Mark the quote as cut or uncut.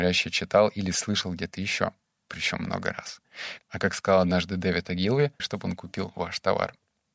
cut